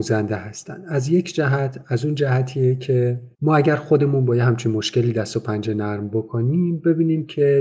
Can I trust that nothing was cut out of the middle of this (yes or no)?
no